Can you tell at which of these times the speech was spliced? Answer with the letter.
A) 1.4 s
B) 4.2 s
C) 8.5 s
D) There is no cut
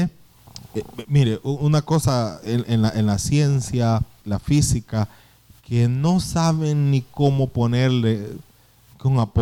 B